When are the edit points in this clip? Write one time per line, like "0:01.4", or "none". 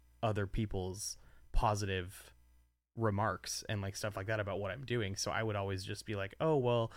none